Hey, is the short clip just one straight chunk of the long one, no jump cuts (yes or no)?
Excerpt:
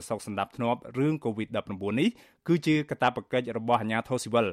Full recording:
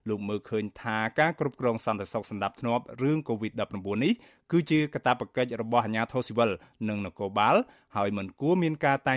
yes